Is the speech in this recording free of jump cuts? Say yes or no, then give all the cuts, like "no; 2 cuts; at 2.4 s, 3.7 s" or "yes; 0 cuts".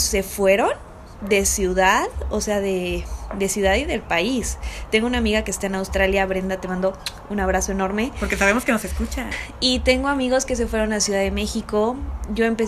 no; 1 cut; at 9.3 s